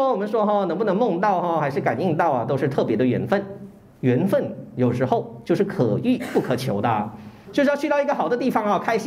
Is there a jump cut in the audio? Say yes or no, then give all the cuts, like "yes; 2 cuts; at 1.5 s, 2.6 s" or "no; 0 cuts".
yes; 1 cut; at 7.5 s